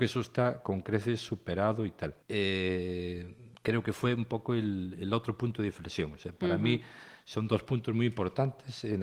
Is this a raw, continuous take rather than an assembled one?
no; 1 cut; at 2.2 s

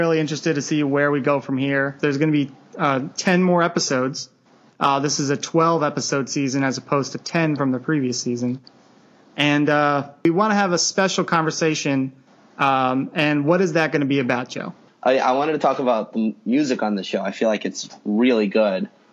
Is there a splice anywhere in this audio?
no; 0 cuts

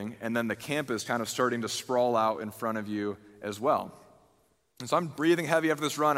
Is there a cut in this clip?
yes; 1 cut; at 1.0 s

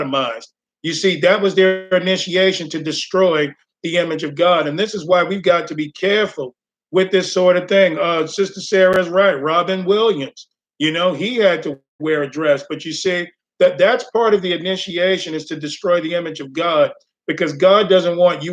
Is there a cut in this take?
no; 0 cuts

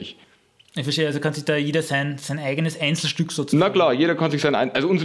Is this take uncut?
yes; 0 cuts

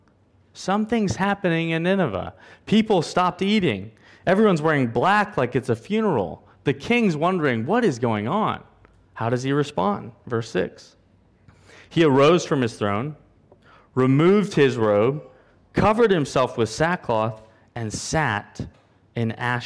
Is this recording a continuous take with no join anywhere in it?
yes; 0 cuts

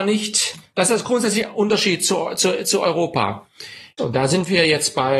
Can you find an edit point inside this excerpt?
yes; 1 cut; at 4.0 s

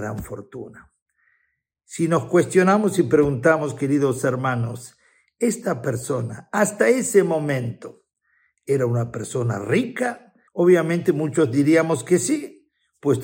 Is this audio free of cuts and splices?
no; 1 cut; at 10.5 s

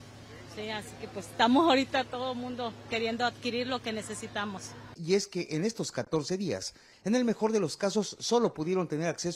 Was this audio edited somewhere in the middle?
yes; 1 cut; at 5.0 s

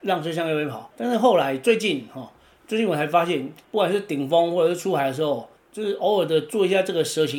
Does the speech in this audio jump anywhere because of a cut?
yes; 2 cuts; at 0.9 s, 3.6 s

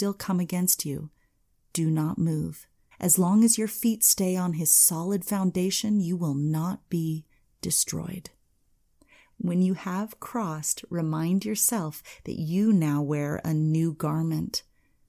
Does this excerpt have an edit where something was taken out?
yes; 1 cut; at 2.9 s

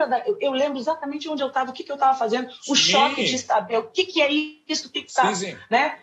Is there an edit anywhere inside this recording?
no; 0 cuts

